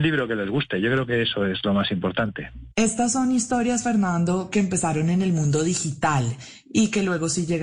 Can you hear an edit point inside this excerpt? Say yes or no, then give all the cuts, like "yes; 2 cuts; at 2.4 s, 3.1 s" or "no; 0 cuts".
no; 0 cuts